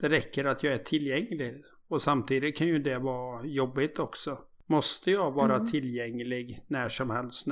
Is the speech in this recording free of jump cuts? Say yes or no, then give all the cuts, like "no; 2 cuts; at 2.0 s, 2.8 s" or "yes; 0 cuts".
yes; 0 cuts